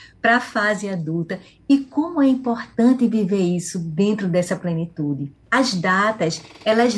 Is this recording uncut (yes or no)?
no